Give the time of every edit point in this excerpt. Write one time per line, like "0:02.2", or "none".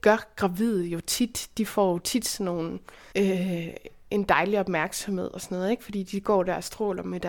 0:03.1

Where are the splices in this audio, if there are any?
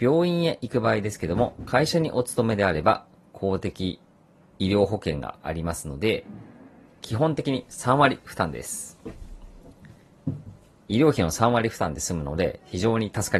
none

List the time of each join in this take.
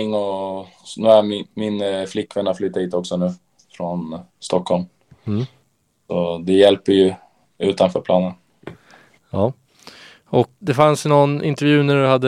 0:10.6

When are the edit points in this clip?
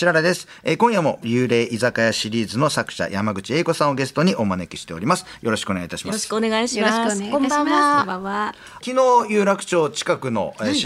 none

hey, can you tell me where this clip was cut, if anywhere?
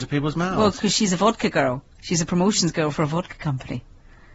none

